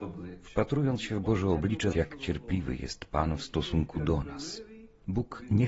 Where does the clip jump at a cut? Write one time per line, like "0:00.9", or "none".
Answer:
0:01.9